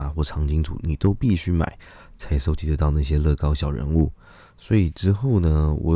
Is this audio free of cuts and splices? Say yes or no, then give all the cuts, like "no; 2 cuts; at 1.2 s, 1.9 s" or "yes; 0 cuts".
yes; 0 cuts